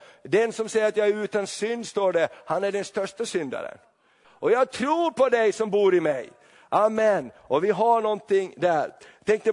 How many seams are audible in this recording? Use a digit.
1